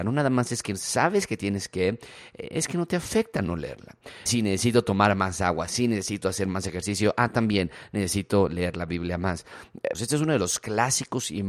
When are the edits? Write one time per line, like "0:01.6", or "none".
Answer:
0:04.3
0:09.9